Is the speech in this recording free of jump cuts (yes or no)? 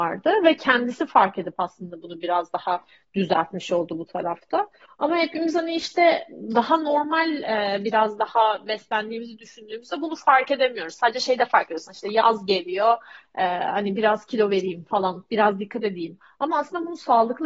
yes